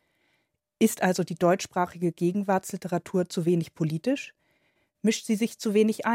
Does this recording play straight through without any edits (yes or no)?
yes